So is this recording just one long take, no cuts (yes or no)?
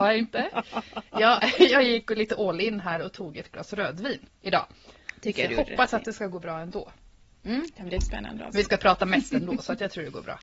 yes